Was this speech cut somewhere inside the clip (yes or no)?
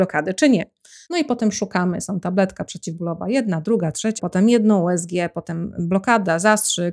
yes